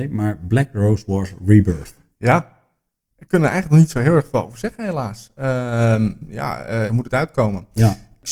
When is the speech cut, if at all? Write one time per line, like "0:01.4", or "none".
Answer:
0:06.9